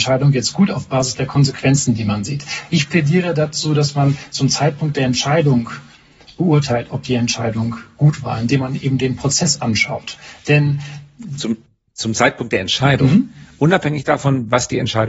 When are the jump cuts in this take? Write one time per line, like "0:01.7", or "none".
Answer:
none